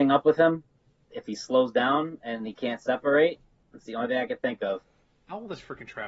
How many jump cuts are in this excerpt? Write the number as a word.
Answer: one